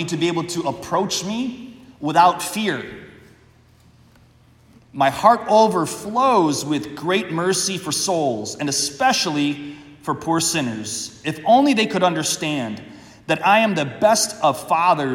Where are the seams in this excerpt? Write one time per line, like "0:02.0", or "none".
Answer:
0:04.8